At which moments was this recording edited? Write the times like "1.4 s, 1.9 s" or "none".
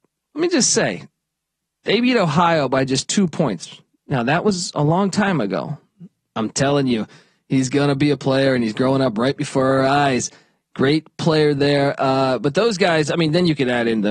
6.3 s